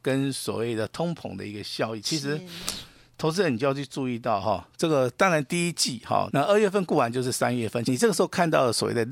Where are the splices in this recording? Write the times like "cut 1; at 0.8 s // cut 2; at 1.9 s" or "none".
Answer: cut 1; at 2.0 s // cut 2; at 6.3 s // cut 3; at 7.8 s